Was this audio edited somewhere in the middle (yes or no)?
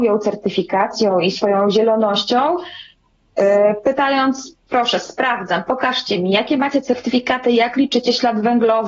no